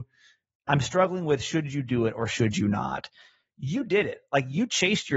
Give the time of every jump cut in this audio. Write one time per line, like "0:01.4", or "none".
none